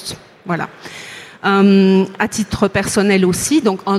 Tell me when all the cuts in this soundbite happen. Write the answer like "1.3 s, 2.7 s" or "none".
none